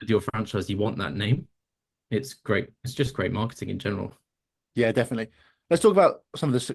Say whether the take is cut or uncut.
uncut